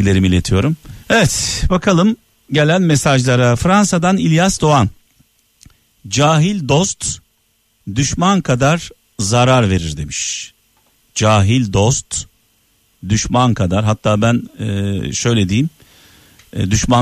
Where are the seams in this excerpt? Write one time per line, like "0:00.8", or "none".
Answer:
0:01.0